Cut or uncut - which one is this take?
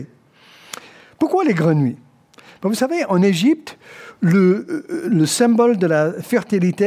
uncut